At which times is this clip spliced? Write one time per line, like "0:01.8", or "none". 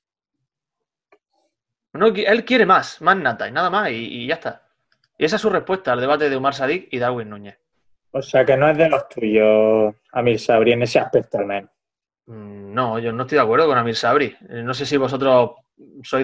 0:13.1